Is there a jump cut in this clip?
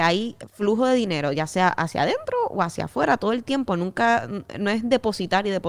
no; 0 cuts

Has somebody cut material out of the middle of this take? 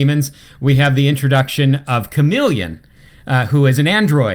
no; 0 cuts

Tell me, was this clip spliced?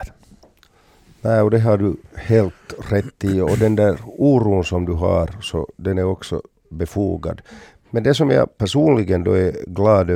no; 0 cuts

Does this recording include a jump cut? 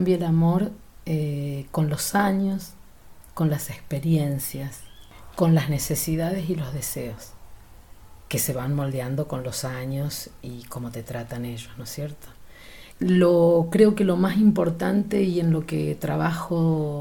yes; 2 cuts; at 8.2 s, 12.9 s

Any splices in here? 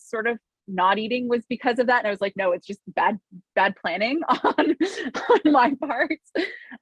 no; 0 cuts

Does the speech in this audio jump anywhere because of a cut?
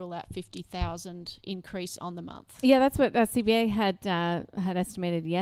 no; 0 cuts

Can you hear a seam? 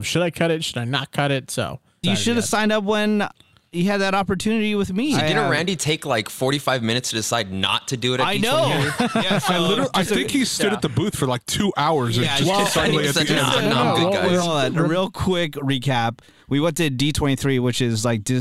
yes; 1 cut; at 2.0 s

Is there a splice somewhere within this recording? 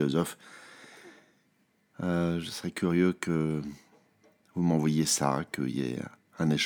yes; 1 cut; at 1.9 s

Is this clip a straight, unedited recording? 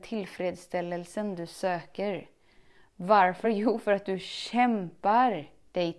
yes; 0 cuts

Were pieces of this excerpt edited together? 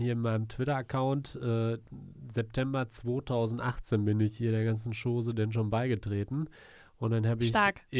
no; 0 cuts

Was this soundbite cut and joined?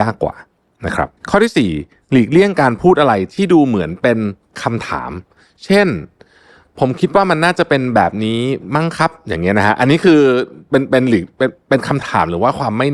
yes; 1 cut; at 1.2 s

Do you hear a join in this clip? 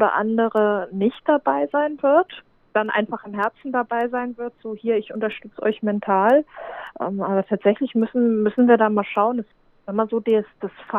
no; 0 cuts

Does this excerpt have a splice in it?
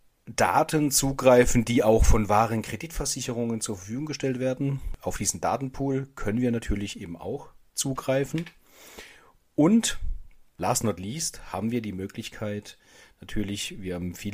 no; 0 cuts

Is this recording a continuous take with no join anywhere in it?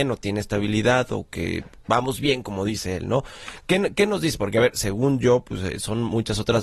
yes; 0 cuts

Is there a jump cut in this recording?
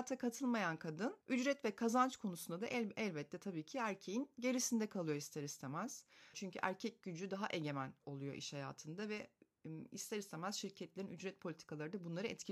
yes; 2 cuts; at 1.2 s, 6.3 s

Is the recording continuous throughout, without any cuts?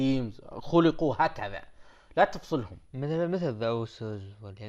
yes; 0 cuts

